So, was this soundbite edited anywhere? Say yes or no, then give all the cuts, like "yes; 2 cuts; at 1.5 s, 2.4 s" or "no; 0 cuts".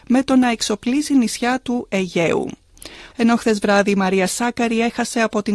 yes; 1 cut; at 3.1 s